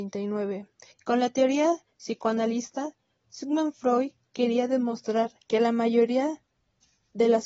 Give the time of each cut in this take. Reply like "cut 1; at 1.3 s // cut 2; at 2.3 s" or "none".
cut 1; at 0.9 s // cut 2; at 5.4 s